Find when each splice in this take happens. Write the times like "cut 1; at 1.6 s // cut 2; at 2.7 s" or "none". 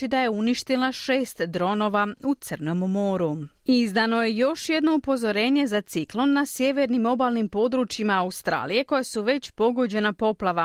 cut 1; at 3.6 s

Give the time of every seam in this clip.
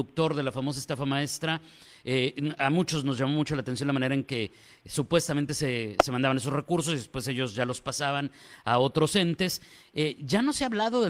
none

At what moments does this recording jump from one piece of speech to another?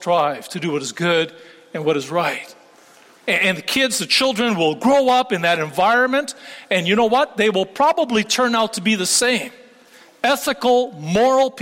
cut 1; at 3.2 s

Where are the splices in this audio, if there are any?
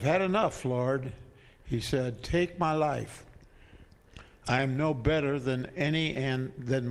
none

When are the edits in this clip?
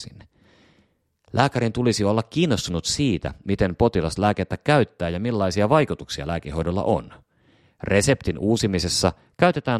none

